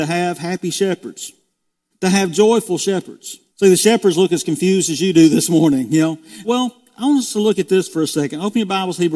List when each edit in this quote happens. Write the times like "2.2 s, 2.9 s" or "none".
1.9 s, 3.5 s, 6.4 s